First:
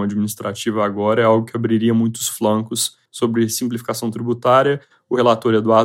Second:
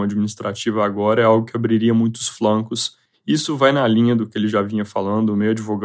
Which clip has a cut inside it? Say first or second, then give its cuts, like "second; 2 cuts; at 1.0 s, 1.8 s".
first; 1 cut; at 3.1 s